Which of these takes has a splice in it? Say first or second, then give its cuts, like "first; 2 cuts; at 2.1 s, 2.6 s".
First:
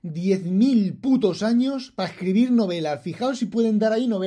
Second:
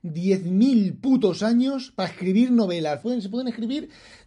second; 1 cut; at 3.0 s